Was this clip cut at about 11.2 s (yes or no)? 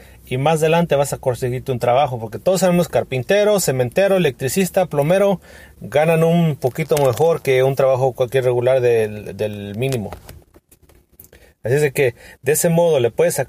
no